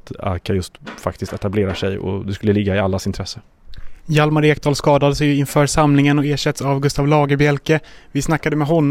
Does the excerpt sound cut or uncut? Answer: uncut